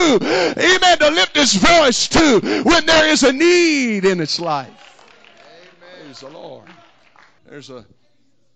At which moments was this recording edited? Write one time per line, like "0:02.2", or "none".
0:07.4